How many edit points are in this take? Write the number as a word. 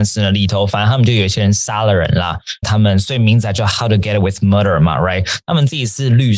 one